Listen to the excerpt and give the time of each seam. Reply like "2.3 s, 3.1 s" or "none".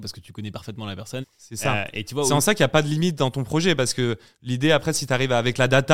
1.2 s

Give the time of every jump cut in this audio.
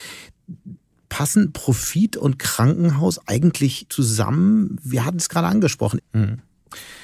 3.9 s, 6.0 s

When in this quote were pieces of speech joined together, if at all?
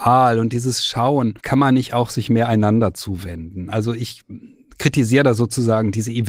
1.4 s

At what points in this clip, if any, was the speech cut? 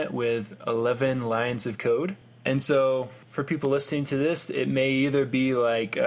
none

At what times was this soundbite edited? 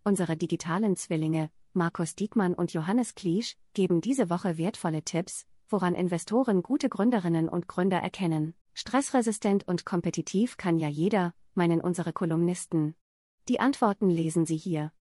8.6 s, 13.3 s

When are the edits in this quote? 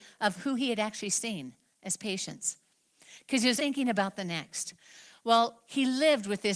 3.6 s

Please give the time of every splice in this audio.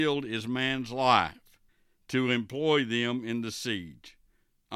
none

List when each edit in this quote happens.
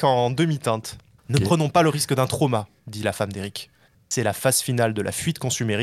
1.2 s, 3.9 s

